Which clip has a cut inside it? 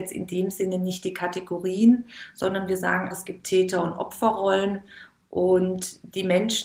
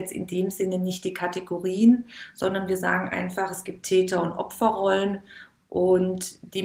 first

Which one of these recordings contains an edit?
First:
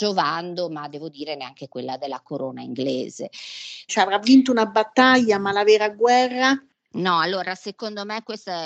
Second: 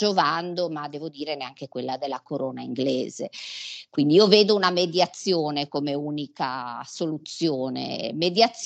first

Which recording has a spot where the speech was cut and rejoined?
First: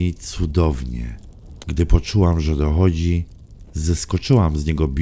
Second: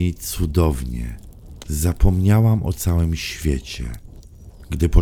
first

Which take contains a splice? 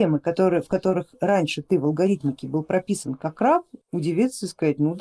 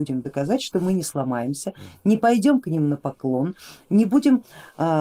first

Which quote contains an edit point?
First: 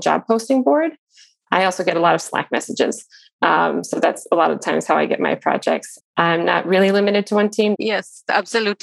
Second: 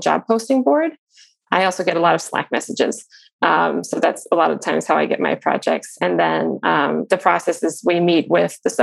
first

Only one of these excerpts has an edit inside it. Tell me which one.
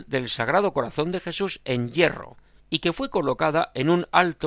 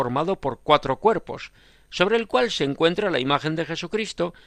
first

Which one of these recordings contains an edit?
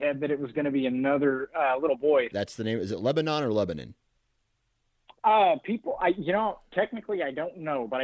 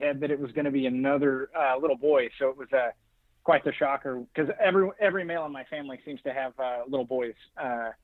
first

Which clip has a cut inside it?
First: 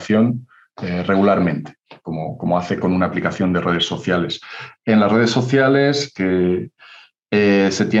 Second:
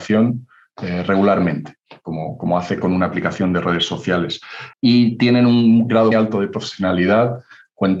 second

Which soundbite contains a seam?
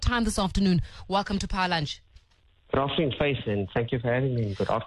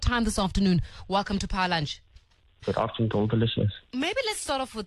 second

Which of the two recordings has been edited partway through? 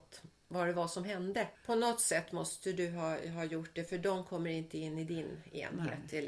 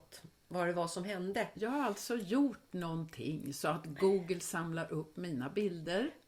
first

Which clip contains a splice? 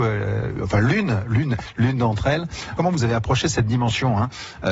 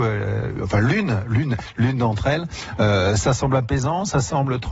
first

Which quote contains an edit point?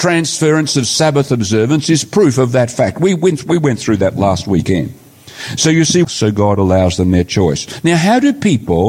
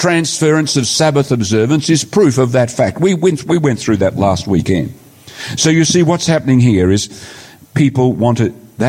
first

